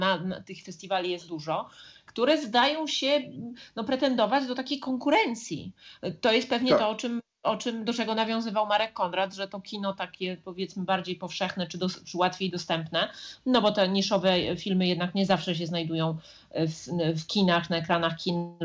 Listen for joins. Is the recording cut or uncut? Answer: uncut